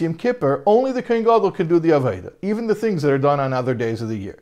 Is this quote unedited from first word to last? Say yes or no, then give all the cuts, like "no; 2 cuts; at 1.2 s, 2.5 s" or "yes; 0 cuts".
yes; 0 cuts